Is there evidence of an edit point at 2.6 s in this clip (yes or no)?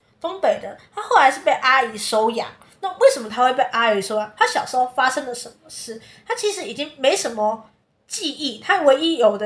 no